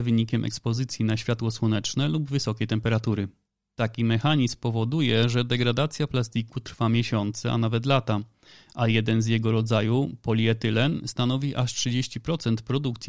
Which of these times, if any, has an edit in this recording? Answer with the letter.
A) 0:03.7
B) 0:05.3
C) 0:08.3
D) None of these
D